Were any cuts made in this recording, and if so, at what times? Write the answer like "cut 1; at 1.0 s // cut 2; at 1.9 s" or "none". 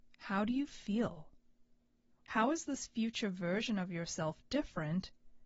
cut 1; at 2.2 s